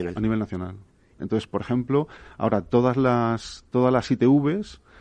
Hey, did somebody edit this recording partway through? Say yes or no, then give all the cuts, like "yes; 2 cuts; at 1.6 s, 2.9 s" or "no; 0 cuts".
yes; 1 cut; at 1.2 s